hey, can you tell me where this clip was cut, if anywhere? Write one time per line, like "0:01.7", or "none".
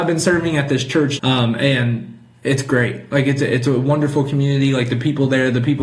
0:01.2